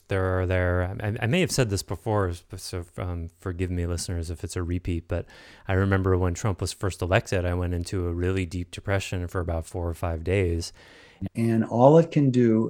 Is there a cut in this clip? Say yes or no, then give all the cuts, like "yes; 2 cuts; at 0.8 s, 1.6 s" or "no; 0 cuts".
yes; 1 cut; at 11.3 s